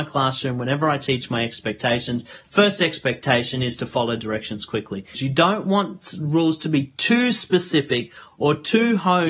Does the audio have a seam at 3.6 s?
no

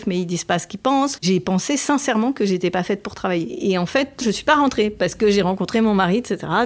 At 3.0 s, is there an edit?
no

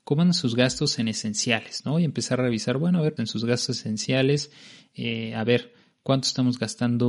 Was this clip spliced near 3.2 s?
yes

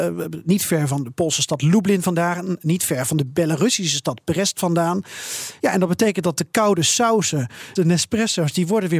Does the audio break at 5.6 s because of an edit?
yes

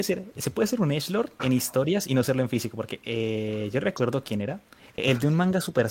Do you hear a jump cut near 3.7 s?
no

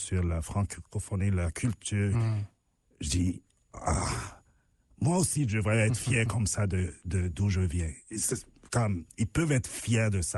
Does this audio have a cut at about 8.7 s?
no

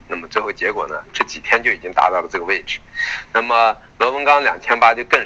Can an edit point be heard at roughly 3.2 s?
yes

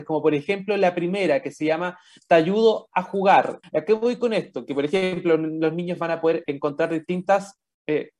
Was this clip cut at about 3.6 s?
yes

